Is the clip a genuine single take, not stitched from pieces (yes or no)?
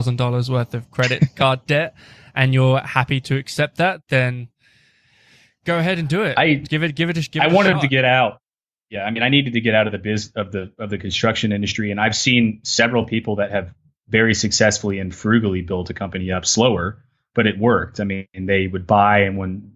yes